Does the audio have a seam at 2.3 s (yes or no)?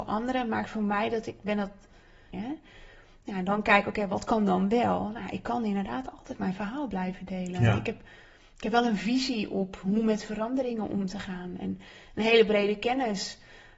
yes